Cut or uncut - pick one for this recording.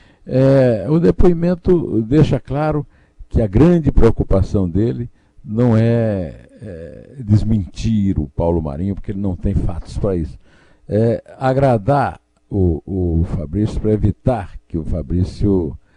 uncut